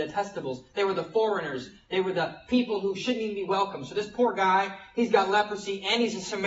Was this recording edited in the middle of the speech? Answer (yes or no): no